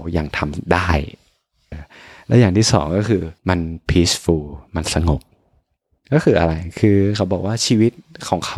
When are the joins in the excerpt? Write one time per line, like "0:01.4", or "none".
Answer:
0:01.7
0:03.4